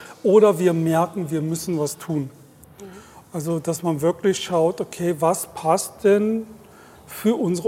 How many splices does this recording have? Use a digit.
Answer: 1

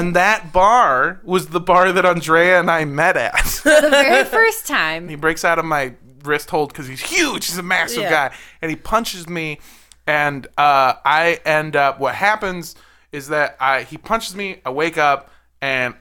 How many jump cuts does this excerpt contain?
1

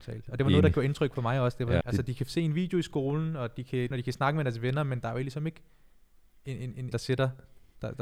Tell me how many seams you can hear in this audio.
3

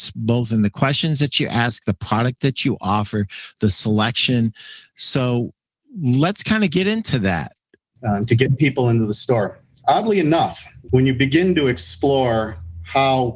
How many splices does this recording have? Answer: 2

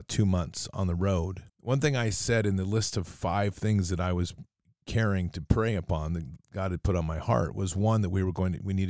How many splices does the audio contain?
1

